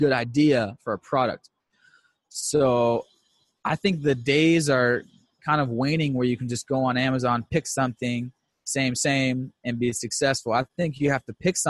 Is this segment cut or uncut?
uncut